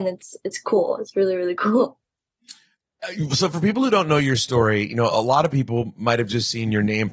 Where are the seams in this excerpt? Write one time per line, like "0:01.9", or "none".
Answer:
none

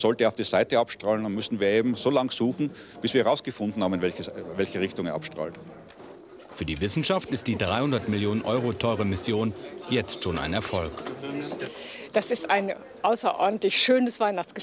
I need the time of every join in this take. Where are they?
0:06.5

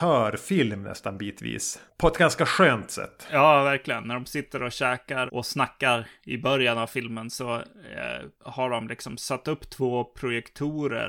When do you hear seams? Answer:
0:05.3

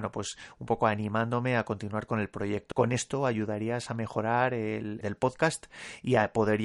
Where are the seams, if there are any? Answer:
0:02.7
0:05.0

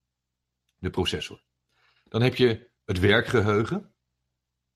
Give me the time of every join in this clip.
none

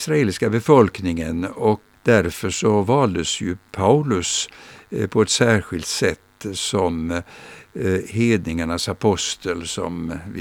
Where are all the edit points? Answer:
0:01.9
0:03.7

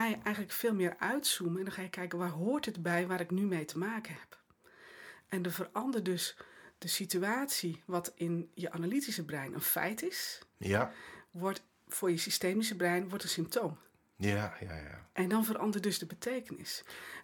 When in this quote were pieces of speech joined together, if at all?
none

